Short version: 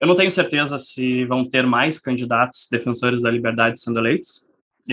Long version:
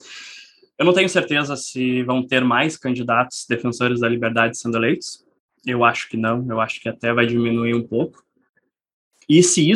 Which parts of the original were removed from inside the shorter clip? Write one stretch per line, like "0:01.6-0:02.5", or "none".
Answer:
none